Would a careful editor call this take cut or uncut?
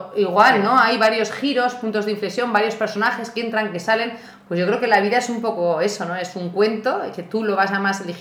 uncut